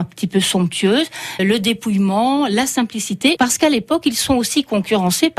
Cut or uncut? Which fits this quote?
cut